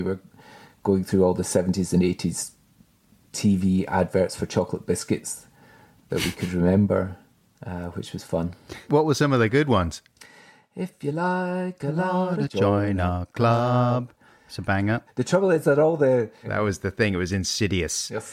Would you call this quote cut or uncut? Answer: cut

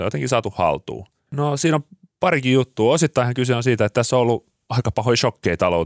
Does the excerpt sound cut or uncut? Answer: cut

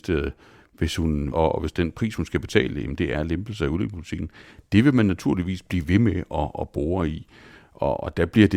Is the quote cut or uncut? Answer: cut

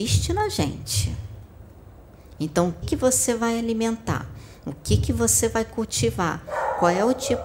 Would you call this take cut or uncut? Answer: cut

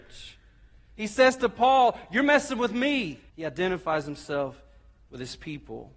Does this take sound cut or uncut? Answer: cut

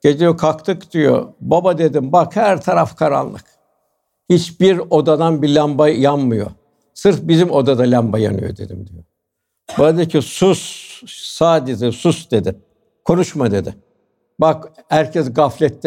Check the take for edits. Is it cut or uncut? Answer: uncut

